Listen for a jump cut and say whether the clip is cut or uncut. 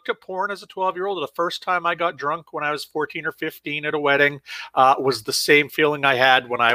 uncut